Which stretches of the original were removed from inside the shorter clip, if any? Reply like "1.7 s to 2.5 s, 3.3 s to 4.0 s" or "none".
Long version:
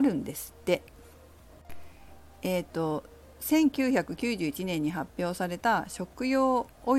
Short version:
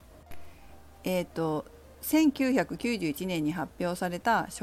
none